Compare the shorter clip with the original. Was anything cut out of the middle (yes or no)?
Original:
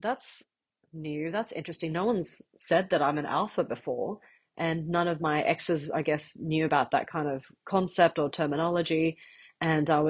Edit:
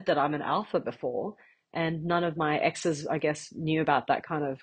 no